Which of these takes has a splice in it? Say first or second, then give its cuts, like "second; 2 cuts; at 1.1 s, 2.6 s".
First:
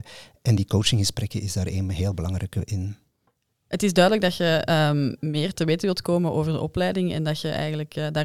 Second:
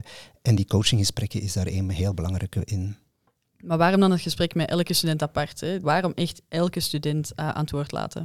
second; 2 cuts; at 3.4 s, 5.8 s